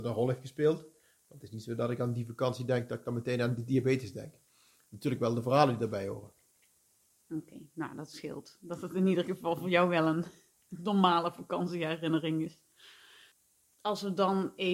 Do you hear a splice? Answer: no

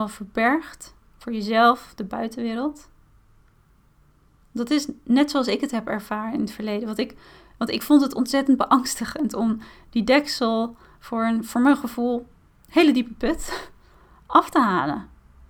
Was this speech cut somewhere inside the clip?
no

